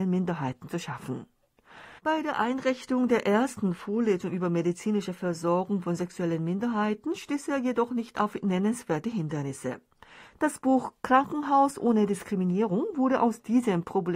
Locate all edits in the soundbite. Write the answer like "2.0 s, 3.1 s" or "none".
2.0 s, 10.3 s